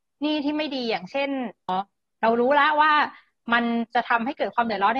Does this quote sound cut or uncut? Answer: cut